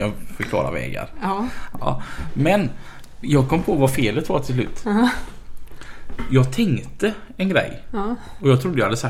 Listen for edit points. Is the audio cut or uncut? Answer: uncut